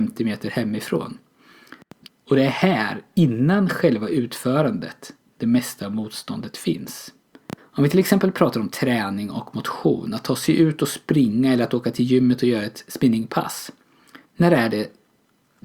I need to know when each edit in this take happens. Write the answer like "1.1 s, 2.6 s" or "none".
2.1 s, 7.6 s, 14.3 s